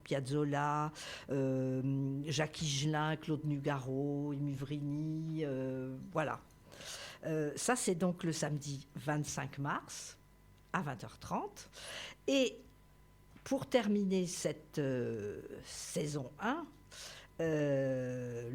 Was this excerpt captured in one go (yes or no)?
yes